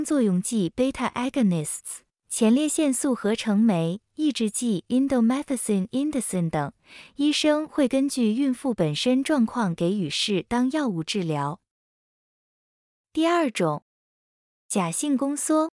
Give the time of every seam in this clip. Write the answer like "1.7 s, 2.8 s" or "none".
none